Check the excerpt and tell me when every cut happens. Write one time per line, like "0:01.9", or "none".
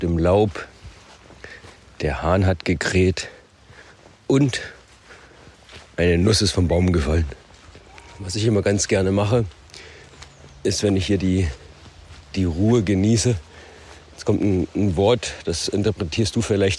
none